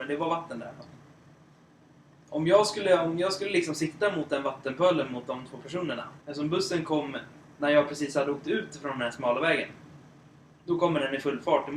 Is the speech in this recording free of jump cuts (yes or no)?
no